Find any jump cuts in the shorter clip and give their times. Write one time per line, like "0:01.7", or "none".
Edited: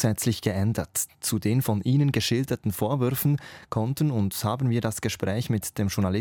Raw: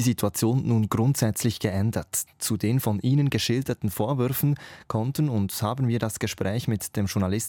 none